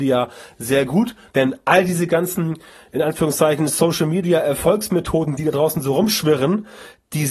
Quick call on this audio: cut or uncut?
cut